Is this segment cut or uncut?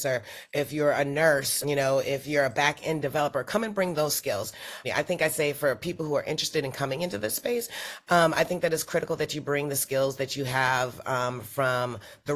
cut